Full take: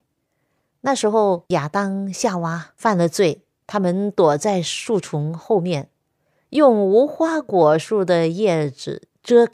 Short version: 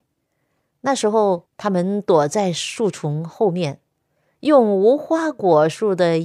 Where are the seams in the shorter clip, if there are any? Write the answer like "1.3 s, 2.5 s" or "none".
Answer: 1.5 s